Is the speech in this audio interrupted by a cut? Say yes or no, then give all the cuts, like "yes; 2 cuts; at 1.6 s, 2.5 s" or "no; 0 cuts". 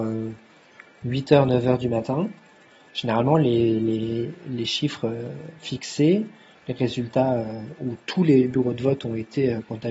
no; 0 cuts